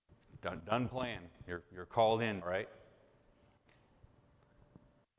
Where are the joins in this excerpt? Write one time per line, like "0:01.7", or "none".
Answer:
0:02.4